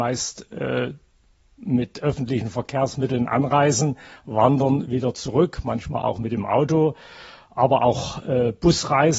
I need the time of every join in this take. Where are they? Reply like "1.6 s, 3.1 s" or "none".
none